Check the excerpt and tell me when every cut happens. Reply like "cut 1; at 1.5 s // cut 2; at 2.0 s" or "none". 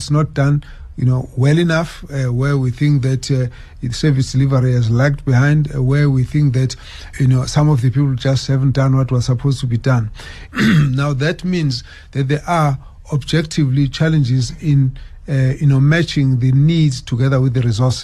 cut 1; at 7.1 s // cut 2; at 10.5 s